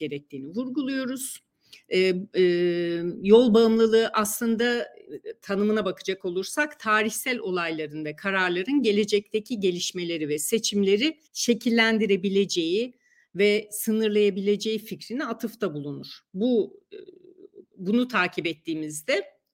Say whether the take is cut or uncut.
cut